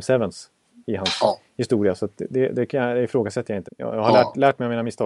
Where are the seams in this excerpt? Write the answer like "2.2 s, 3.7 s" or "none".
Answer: 3.7 s